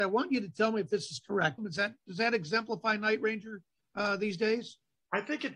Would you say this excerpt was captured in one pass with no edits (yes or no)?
no